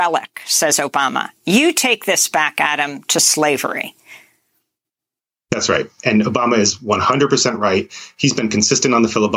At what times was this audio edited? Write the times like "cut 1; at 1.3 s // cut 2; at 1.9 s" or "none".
none

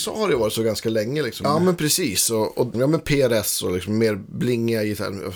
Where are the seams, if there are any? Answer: cut 1; at 1.4 s // cut 2; at 2.7 s

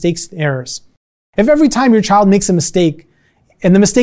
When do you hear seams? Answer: none

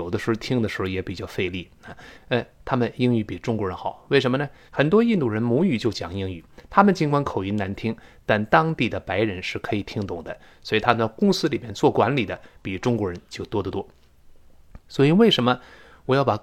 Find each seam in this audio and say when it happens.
cut 1; at 2.2 s // cut 2; at 4.7 s

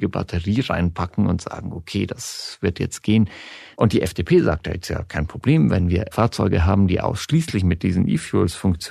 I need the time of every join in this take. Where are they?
cut 1; at 3.7 s // cut 2; at 6.1 s

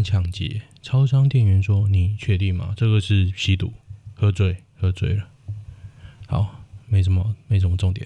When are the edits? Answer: none

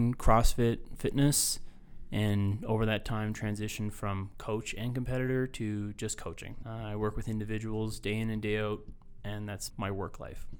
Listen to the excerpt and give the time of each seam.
cut 1; at 6.6 s // cut 2; at 9.7 s

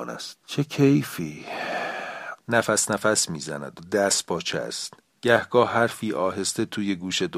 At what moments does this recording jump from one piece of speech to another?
cut 1; at 2.4 s

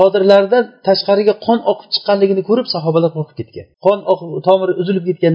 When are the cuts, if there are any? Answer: cut 1; at 3.7 s

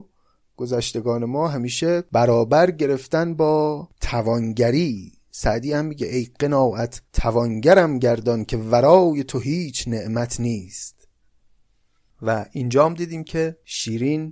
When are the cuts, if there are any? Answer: cut 1; at 7.1 s

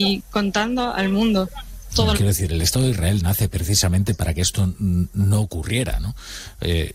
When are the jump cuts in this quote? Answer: cut 1; at 2.1 s

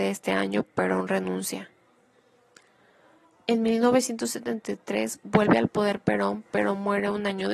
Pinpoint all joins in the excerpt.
none

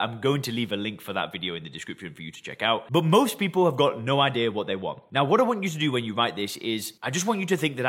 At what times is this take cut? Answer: none

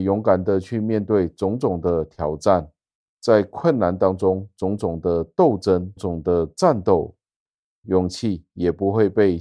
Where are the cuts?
cut 1; at 6.0 s // cut 2; at 7.8 s

